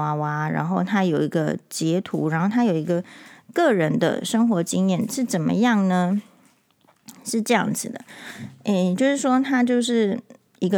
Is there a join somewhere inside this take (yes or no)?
no